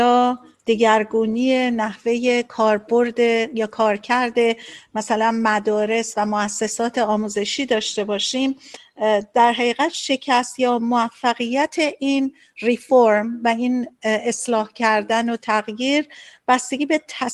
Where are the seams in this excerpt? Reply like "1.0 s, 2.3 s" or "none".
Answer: none